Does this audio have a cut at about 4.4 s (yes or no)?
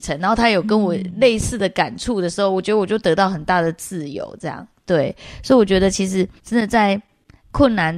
no